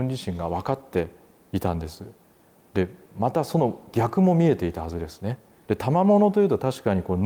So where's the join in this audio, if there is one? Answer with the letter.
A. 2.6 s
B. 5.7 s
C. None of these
B